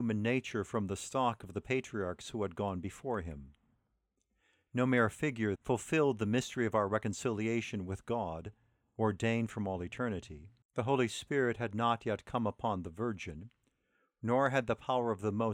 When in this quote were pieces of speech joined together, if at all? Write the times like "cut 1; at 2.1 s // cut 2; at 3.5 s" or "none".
cut 1; at 5.6 s // cut 2; at 10.6 s